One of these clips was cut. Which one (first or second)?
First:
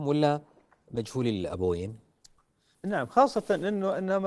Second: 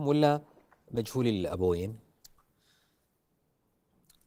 first